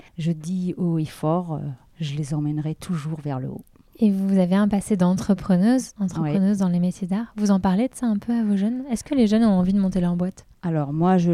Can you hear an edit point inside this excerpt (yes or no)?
no